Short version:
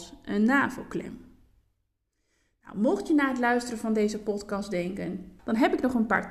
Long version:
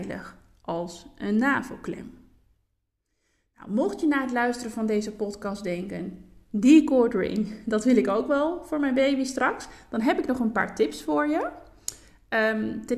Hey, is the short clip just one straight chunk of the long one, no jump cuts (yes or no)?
no